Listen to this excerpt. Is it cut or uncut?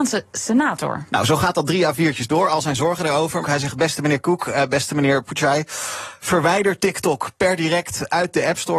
cut